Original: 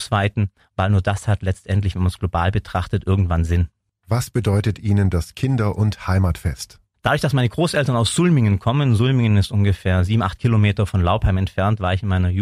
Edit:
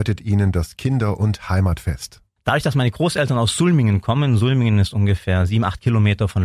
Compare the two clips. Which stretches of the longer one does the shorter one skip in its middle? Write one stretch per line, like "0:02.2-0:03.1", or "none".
none